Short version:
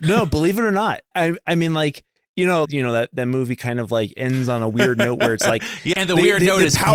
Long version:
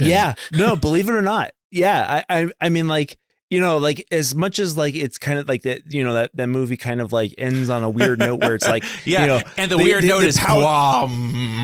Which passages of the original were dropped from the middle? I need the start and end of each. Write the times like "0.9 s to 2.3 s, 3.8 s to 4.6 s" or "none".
1.6 s to 2.3 s, 3.8 s to 5.9 s, 9.1 s to 9.5 s